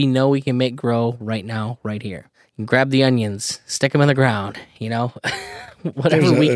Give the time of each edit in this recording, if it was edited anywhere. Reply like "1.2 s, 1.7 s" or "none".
none